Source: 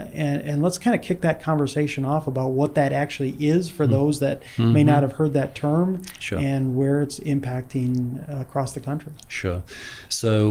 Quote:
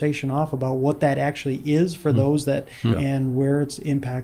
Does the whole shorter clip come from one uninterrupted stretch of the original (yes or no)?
no